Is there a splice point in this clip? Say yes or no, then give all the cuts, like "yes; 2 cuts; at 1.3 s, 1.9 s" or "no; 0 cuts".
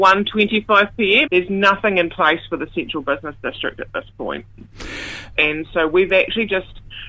yes; 2 cuts; at 1.3 s, 5.4 s